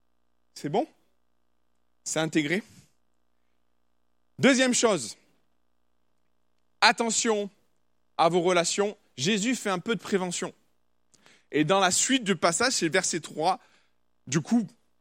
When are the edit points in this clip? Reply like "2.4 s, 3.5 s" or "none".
none